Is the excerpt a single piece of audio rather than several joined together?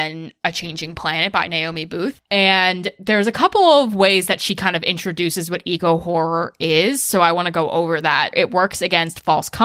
no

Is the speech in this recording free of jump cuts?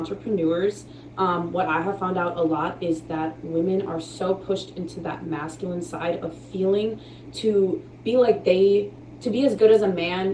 yes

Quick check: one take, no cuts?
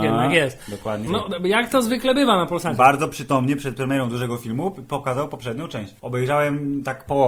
no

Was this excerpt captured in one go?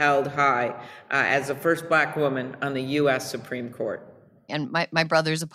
no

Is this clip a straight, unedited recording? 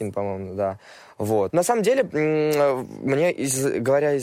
no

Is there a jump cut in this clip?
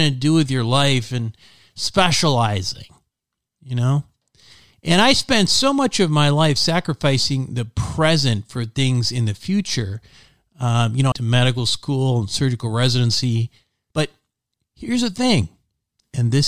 yes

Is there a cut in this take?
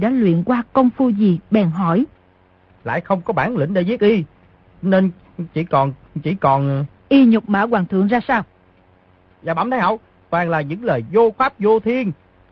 yes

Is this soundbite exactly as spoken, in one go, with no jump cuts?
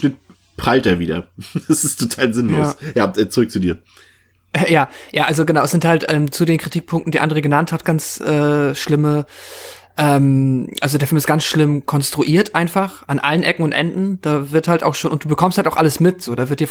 no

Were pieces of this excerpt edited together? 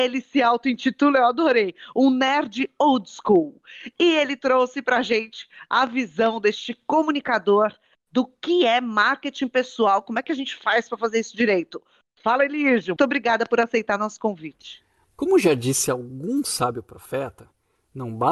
yes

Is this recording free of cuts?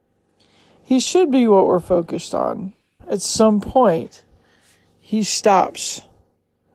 no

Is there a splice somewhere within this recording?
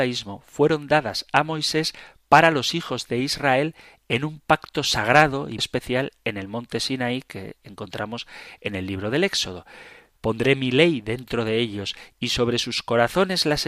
yes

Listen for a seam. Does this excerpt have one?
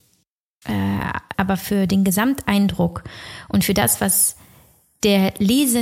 yes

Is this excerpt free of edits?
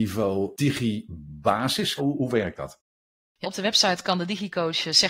no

